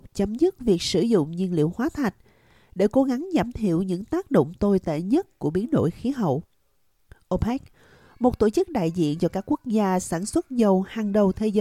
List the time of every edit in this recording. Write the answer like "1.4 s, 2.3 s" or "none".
none